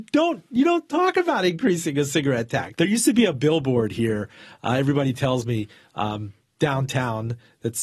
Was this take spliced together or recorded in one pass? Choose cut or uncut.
cut